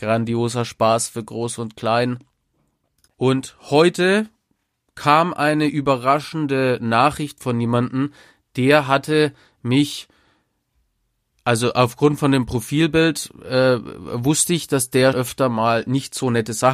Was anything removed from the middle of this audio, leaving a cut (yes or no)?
yes